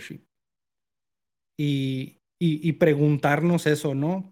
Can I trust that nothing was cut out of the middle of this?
yes; 0 cuts

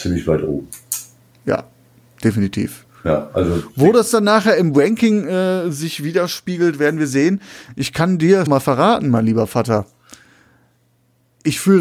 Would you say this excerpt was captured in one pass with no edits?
no; 1 cut; at 8.5 s

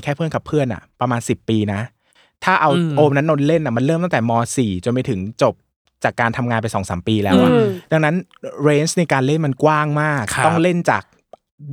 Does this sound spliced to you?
no; 0 cuts

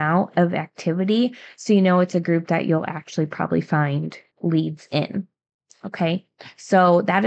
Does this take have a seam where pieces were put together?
no; 0 cuts

